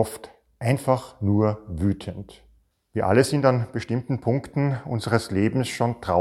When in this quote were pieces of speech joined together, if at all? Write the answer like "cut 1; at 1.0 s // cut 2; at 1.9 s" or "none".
cut 1; at 2.7 s